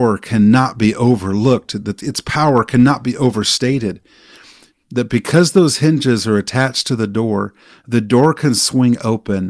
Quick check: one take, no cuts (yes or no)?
no